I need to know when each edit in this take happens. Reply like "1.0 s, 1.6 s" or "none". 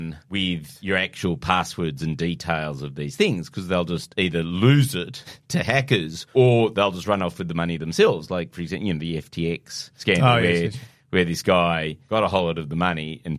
none